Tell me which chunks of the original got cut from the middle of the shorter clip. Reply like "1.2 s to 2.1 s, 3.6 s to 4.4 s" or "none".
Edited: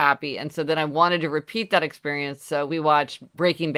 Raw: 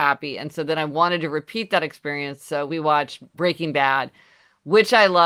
none